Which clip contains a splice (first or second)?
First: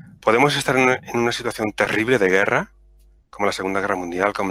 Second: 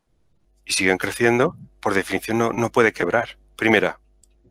second